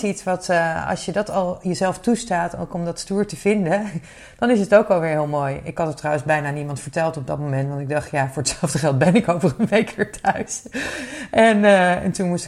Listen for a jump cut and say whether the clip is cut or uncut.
uncut